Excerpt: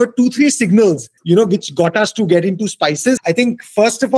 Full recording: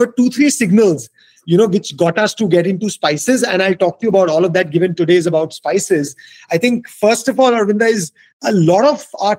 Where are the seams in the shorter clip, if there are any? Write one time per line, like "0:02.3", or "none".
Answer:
0:01.2
0:03.2